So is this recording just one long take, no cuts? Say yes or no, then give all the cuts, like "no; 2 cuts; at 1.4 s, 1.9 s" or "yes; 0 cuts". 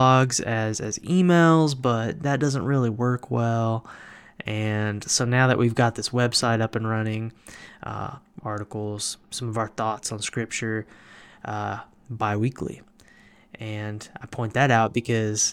no; 1 cut; at 8.4 s